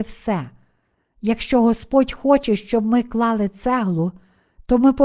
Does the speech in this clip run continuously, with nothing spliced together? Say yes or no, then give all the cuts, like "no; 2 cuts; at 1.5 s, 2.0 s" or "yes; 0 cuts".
yes; 0 cuts